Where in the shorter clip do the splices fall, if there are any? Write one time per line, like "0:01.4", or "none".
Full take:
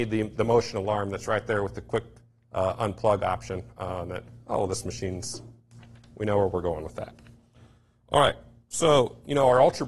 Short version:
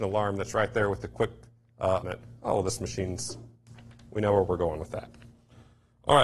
0:02.0